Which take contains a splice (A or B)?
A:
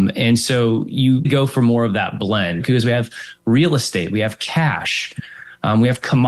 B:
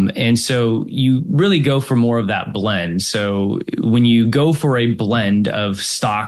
A